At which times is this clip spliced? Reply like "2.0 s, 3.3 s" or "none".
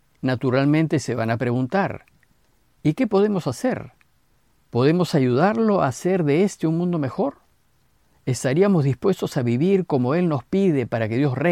none